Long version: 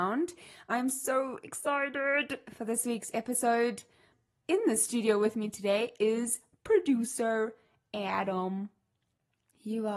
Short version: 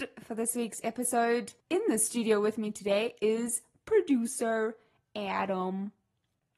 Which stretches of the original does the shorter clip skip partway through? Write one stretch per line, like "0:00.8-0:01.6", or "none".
0:03.9-0:04.4